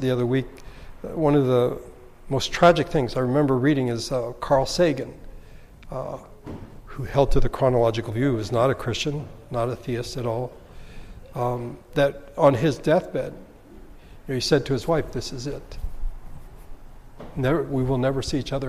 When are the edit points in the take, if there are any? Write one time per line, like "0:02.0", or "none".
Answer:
none